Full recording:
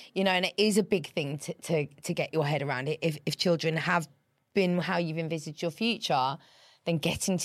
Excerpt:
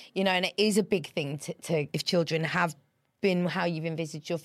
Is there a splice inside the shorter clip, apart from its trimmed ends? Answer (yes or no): yes